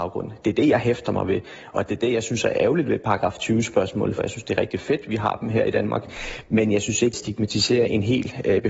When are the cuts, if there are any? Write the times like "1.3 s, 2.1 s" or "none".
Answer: 4.2 s, 7.1 s